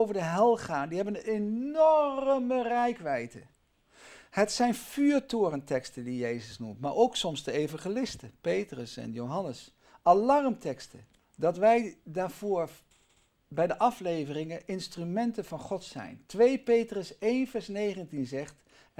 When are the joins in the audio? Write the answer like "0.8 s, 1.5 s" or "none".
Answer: 11.2 s